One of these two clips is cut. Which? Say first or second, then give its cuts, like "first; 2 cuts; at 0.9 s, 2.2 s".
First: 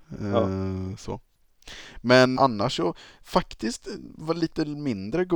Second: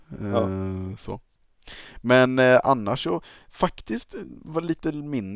first; 1 cut; at 2.4 s